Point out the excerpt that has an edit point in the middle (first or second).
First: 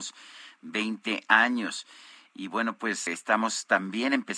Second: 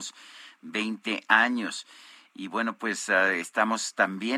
first